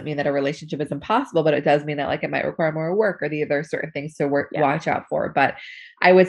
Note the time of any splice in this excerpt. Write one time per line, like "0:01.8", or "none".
none